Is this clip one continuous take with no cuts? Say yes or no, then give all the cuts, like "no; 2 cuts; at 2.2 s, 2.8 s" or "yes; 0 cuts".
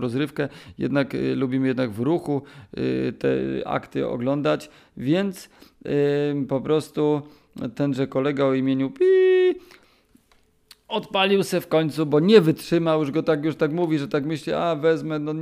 yes; 0 cuts